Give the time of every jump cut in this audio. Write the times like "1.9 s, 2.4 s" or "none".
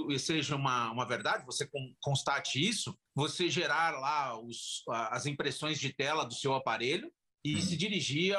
3.1 s